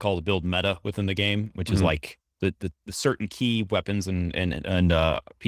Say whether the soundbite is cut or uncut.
uncut